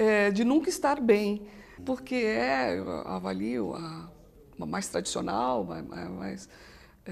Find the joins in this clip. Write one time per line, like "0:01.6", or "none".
0:01.8

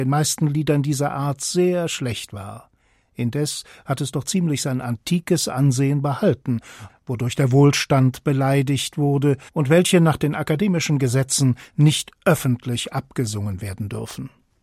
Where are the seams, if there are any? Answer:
0:06.9
0:09.5

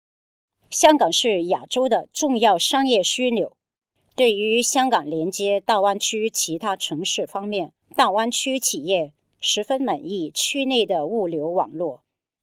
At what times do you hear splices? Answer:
0:04.0
0:07.8

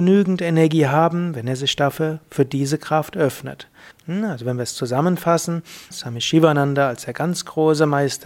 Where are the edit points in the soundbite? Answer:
0:03.9
0:05.9

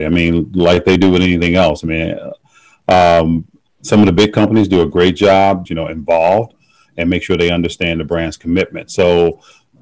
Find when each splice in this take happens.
0:05.7

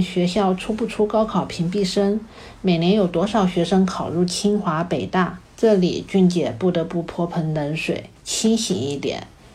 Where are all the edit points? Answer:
0:05.4
0:08.2

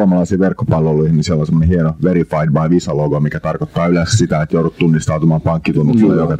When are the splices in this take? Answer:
none

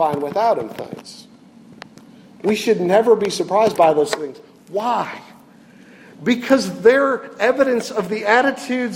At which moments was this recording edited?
none

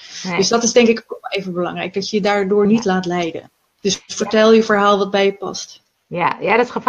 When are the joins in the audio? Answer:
none

